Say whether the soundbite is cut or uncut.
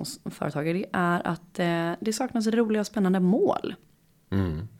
uncut